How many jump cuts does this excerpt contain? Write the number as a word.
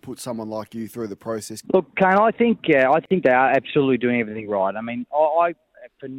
one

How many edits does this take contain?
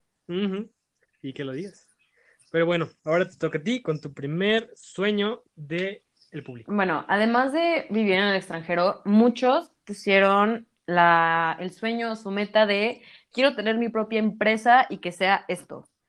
zero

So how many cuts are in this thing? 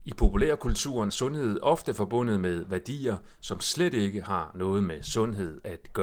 one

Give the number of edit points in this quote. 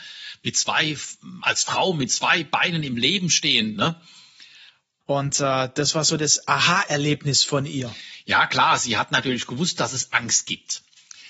one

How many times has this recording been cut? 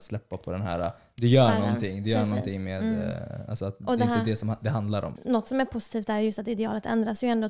one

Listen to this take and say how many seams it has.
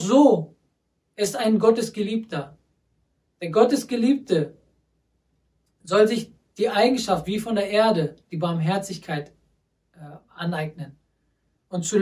zero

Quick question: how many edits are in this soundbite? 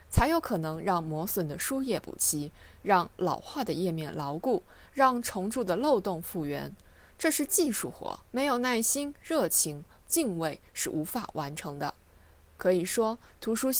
two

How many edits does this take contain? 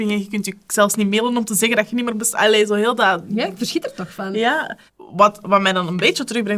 one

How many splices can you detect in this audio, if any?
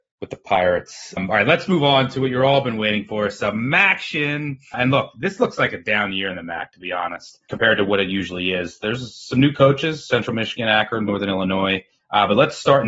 one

